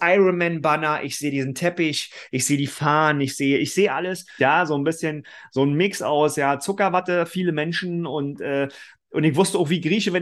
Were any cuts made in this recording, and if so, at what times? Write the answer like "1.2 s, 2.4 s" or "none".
4.4 s